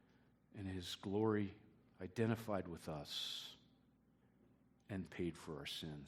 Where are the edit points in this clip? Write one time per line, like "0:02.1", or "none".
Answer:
0:01.9
0:05.1